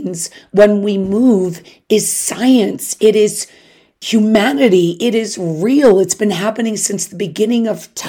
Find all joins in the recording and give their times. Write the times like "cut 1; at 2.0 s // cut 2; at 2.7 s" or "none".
none